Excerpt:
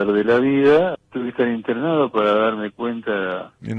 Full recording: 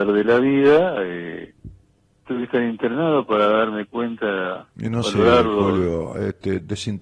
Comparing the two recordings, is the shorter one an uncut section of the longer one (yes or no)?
no